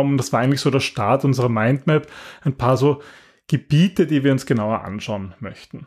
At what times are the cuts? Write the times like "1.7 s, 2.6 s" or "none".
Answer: none